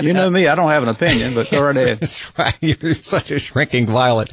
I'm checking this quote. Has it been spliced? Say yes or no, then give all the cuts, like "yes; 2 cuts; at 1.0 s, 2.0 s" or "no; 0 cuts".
no; 0 cuts